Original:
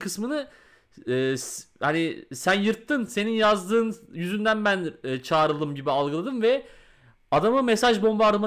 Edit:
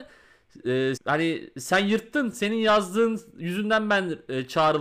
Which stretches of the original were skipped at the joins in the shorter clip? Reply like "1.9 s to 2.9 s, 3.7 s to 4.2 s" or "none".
1.4 s to 1.7 s